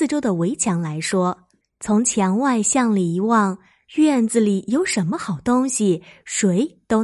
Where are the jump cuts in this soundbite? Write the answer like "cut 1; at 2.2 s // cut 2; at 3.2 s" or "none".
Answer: cut 1; at 1.6 s